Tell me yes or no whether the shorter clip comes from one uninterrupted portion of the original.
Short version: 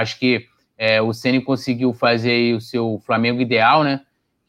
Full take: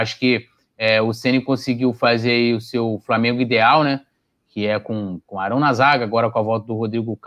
yes